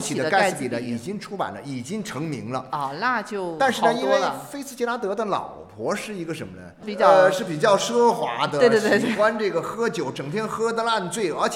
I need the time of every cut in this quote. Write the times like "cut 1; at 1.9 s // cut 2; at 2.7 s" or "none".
none

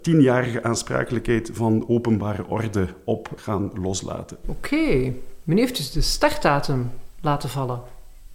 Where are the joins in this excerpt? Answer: cut 1; at 3.4 s // cut 2; at 4.4 s

